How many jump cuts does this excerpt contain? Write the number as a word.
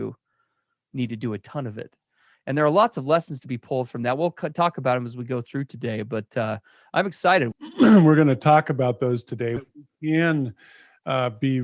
two